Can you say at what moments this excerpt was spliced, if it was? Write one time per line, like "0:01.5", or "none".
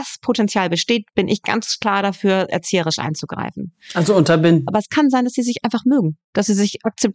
0:04.7